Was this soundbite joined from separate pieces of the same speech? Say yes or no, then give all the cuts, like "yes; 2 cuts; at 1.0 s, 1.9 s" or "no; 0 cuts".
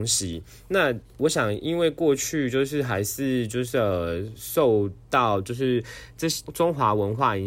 yes; 1 cut; at 6.4 s